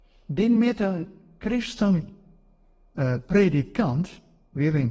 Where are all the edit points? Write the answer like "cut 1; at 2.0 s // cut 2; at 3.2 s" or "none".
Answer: none